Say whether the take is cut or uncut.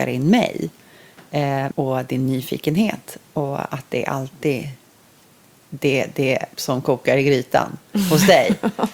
cut